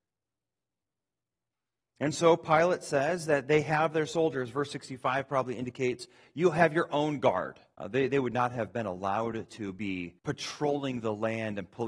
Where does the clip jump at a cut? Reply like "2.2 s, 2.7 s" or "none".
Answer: 7.8 s, 10.2 s